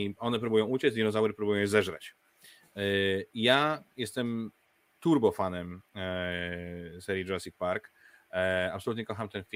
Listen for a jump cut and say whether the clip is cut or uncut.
uncut